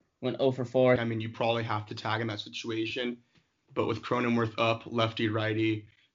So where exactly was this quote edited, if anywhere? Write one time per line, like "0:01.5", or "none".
0:01.0

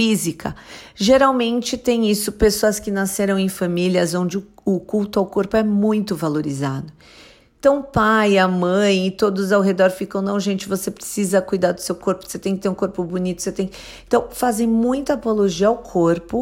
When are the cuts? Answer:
none

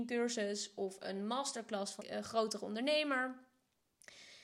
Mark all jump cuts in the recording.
0:02.0

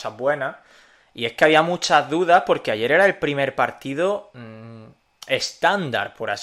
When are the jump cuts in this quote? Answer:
none

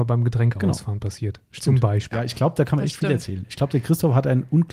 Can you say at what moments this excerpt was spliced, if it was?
0:02.1

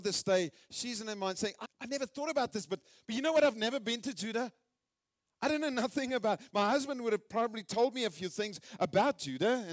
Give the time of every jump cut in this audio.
0:01.6

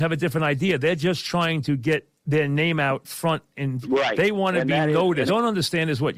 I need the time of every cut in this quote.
0:02.2
0:05.3

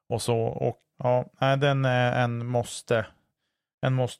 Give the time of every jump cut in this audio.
0:00.9

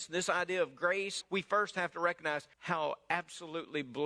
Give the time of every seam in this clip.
0:01.2
0:02.5

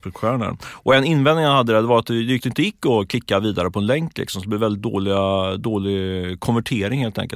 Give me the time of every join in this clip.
0:02.4

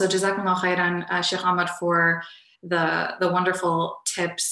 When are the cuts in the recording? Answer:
none

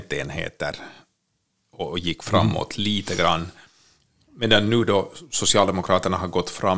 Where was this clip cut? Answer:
none

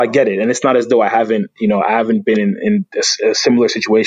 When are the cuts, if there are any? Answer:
none

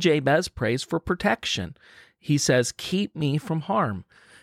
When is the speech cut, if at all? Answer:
none

